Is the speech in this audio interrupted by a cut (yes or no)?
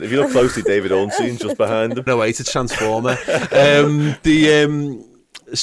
yes